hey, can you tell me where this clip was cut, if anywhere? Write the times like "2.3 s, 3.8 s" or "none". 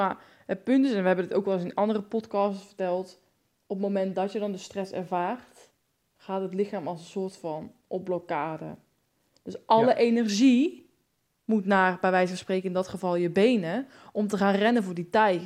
none